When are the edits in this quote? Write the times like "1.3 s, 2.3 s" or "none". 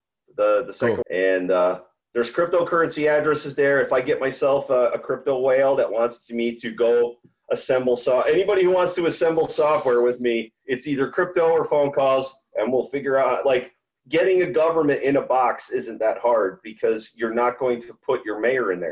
1.0 s